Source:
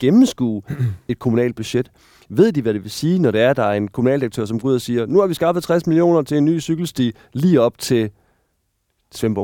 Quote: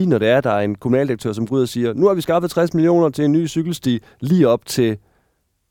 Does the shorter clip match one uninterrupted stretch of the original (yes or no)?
yes